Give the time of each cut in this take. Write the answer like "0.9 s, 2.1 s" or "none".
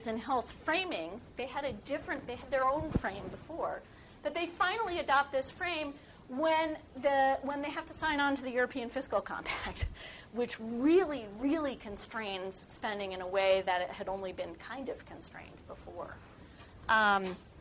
none